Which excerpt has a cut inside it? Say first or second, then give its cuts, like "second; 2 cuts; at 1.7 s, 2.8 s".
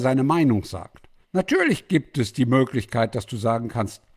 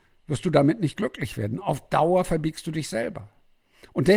first; 1 cut; at 1.2 s